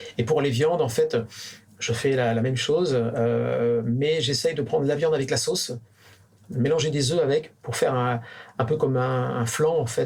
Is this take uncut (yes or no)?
yes